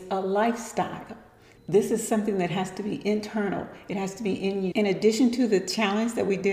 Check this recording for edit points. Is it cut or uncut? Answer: cut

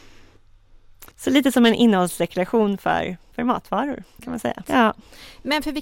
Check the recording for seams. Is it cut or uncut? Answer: cut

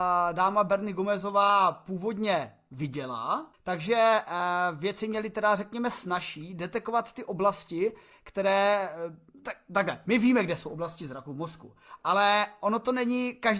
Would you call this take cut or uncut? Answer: cut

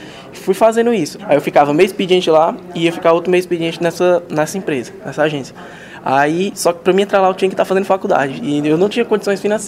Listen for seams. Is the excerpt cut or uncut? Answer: cut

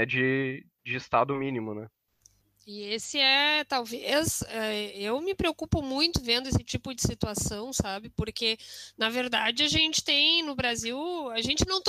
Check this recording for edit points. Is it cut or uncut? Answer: uncut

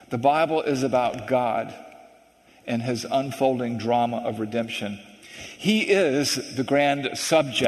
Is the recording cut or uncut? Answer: uncut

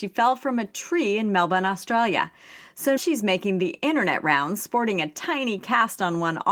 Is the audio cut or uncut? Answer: cut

